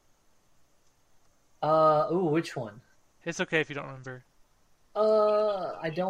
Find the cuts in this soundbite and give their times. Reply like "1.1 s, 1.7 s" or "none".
3.2 s